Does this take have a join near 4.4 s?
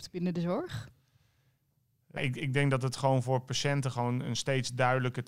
no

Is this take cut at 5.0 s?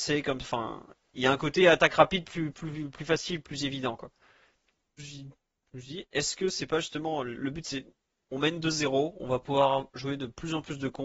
yes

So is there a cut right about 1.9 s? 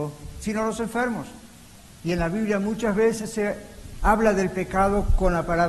no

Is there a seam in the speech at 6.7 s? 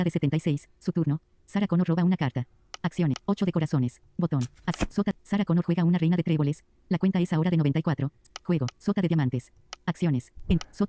no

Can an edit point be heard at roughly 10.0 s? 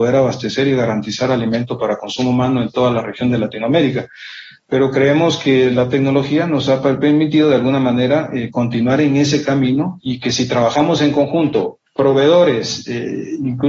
yes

